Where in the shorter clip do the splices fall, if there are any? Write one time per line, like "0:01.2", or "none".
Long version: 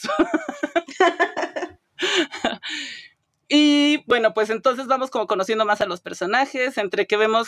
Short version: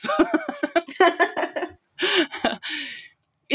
none